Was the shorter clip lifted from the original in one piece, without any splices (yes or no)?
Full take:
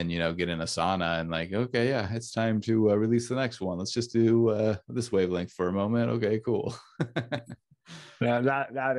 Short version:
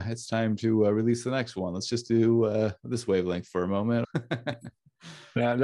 no